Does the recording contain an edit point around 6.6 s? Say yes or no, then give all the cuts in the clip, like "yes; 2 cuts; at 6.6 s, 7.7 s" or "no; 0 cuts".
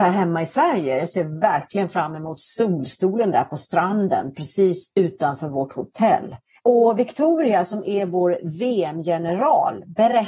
yes; 1 cut; at 6.6 s